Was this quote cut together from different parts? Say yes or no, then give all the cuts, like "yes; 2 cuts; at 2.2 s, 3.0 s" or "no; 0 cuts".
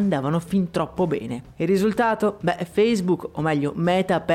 no; 0 cuts